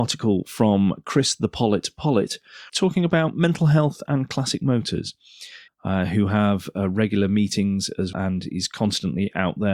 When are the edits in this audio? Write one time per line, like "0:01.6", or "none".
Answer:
0:02.7
0:05.7
0:08.1